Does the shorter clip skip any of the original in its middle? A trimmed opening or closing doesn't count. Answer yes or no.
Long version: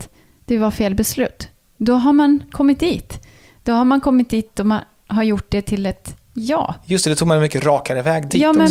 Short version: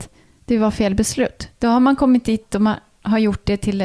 yes